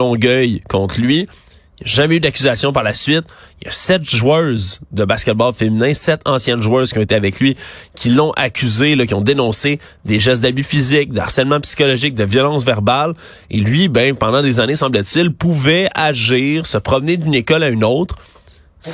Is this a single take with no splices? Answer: yes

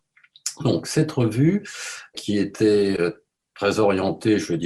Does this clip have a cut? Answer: yes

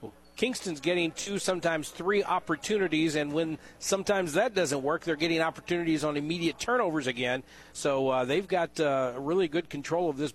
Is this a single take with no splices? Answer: yes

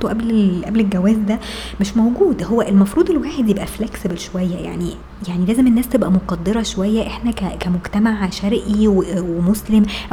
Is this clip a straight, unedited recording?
yes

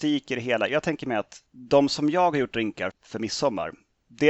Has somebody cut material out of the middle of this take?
yes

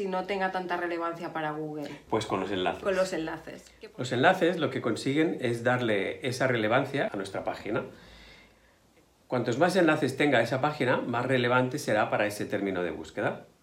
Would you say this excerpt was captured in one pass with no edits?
no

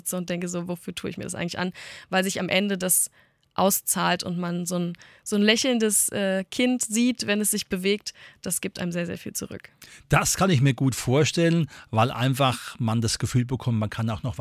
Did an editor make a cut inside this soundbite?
no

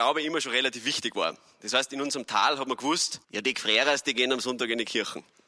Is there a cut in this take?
yes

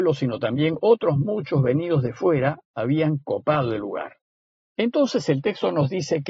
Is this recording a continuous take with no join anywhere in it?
no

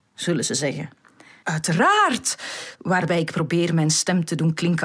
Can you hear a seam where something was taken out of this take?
yes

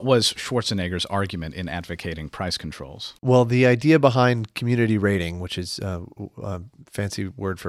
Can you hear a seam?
yes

